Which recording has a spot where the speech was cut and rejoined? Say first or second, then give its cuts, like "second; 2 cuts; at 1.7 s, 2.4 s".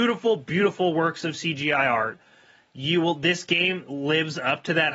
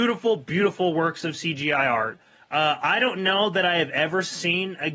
second; 1 cut; at 2.4 s